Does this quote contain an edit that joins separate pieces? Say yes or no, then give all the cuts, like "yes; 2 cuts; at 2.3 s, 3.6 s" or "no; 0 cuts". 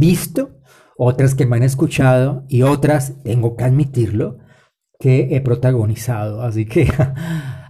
no; 0 cuts